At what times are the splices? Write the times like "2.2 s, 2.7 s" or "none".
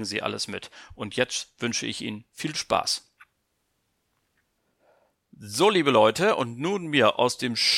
none